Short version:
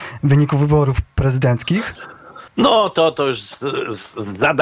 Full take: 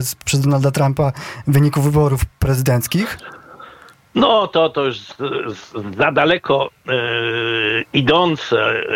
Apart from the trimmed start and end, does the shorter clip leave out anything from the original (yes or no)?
yes